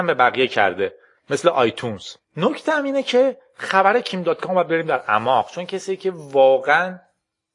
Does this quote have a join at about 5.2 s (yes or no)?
no